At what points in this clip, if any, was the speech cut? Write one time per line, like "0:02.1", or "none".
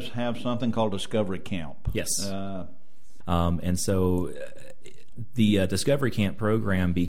0:03.2